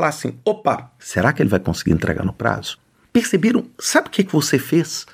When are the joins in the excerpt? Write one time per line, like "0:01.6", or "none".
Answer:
none